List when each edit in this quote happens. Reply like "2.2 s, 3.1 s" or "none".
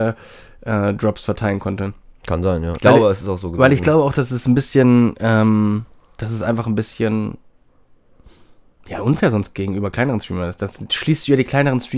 2.8 s